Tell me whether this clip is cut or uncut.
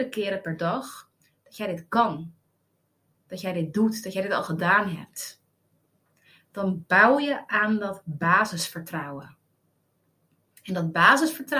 uncut